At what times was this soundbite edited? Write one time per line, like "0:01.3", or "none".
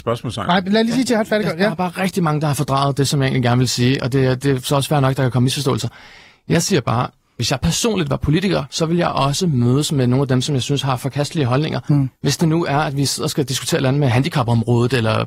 none

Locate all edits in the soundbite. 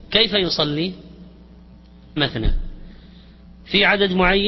0:02.2

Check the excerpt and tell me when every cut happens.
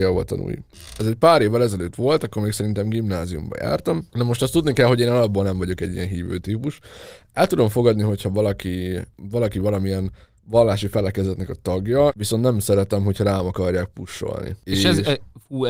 0:12.1

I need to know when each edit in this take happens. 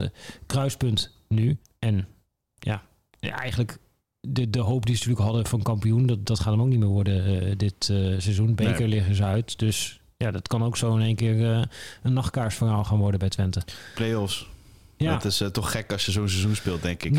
none

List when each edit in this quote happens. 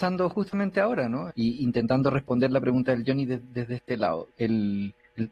0:01.3
0:04.3

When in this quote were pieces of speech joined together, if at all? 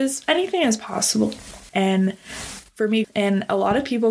0:01.7
0:03.0

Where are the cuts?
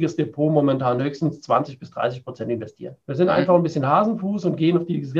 0:03.0

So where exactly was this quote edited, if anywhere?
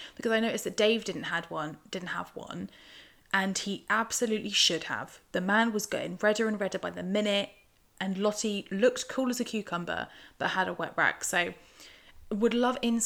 none

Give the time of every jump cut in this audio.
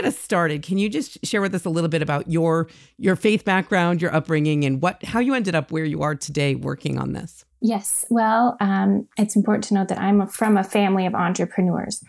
0:08.6

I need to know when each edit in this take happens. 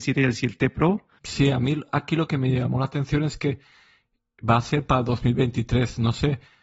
0:01.2

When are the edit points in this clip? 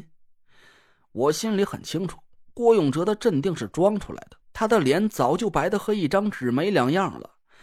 0:04.4

